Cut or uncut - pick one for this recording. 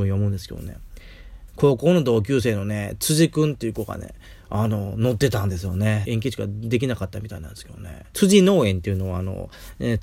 cut